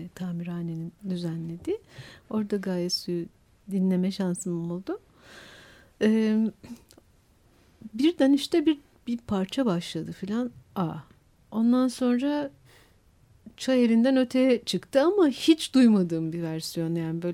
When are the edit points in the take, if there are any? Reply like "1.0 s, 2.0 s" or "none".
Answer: 1.0 s